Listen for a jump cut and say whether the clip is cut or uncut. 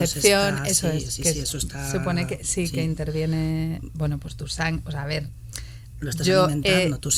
uncut